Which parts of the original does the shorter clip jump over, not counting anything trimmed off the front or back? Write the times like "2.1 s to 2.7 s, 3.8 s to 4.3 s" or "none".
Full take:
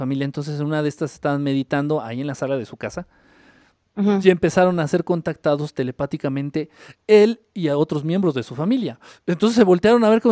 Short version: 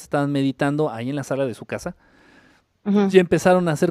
none